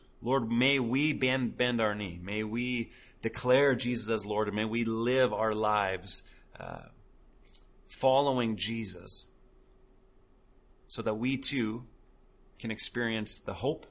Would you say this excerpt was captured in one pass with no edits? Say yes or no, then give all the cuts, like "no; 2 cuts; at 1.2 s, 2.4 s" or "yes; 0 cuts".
yes; 0 cuts